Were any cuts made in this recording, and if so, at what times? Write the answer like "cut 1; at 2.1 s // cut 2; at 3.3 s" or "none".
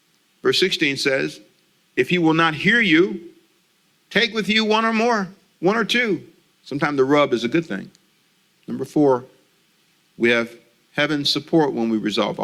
cut 1; at 6.5 s // cut 2; at 8.6 s